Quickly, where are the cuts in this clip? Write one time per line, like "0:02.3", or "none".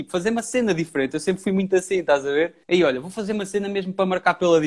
0:02.6